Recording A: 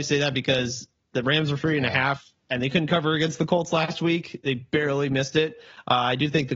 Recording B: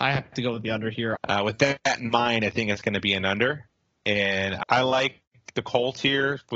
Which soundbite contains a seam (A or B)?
B